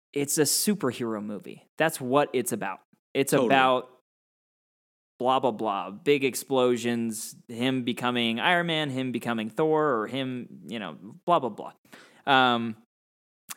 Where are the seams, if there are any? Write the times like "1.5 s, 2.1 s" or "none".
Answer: none

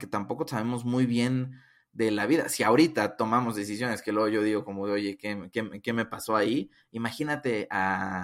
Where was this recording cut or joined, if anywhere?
none

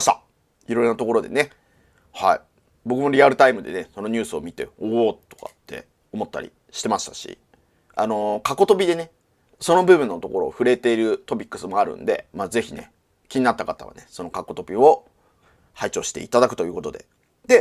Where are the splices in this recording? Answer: none

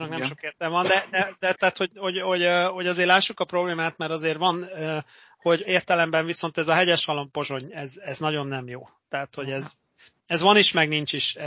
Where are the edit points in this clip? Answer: 5.6 s

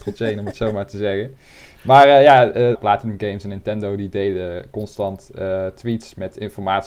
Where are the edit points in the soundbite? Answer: 2.8 s

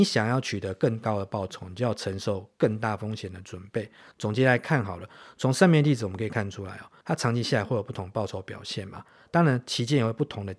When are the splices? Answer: 4.1 s, 7.0 s

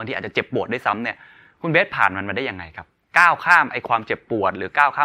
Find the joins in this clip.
none

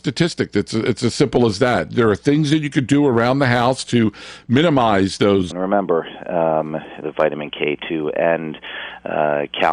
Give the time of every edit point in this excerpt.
5.5 s, 7.0 s

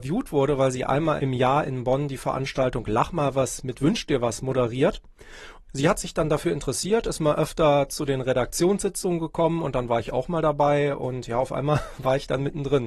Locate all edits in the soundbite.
none

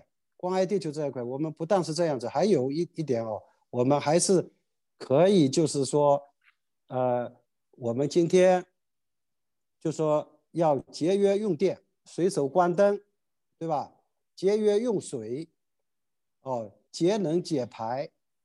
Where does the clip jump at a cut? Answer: none

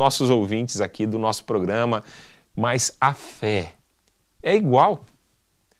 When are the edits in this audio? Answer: 2.5 s, 4.4 s

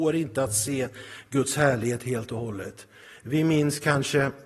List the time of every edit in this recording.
none

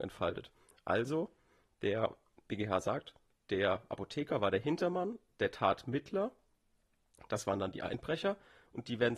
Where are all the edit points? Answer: none

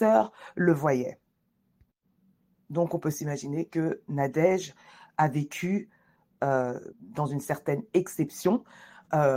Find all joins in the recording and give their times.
6.9 s

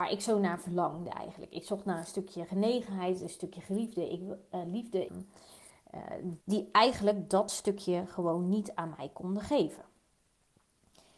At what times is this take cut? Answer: 5.1 s, 6.4 s

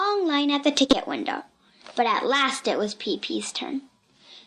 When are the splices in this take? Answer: none

